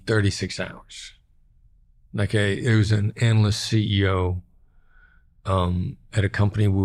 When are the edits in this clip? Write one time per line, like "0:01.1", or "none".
none